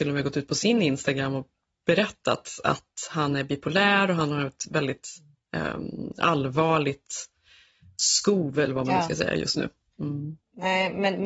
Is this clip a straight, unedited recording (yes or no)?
yes